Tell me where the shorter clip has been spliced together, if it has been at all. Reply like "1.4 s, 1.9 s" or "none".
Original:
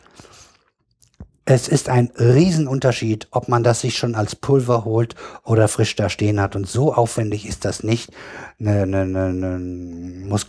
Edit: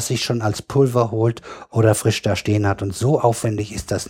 none